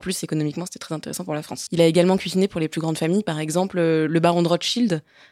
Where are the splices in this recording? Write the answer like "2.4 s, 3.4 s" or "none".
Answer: 1.7 s